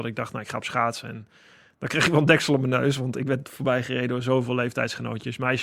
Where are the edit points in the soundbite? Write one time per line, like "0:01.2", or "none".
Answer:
none